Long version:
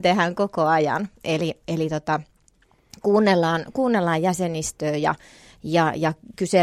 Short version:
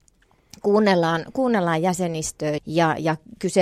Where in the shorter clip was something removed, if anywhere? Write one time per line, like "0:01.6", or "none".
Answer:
0:02.6